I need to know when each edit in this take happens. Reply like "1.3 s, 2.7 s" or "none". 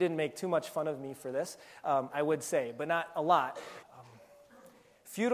2.1 s, 3.8 s